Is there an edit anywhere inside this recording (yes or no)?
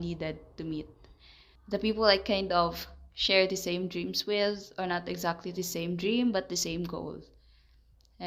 no